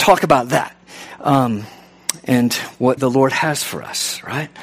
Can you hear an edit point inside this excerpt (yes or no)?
yes